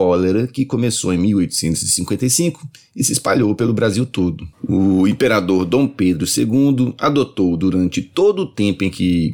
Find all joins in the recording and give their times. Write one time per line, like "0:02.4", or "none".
0:04.5